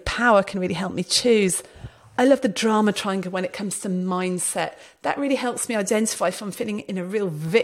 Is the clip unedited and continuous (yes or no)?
yes